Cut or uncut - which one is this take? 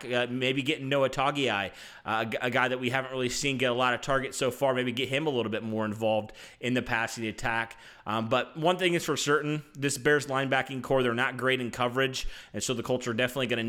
uncut